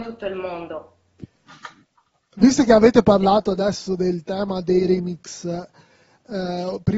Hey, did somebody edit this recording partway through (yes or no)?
no